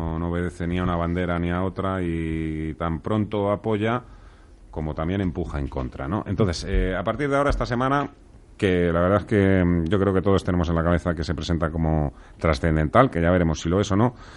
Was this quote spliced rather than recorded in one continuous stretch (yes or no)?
no